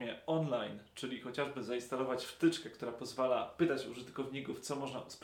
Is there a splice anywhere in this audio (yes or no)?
no